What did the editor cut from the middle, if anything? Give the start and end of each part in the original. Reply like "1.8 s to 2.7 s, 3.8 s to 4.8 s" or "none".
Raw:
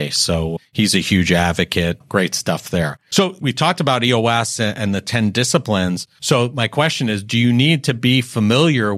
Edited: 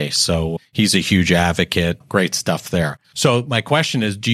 3.0 s to 6.1 s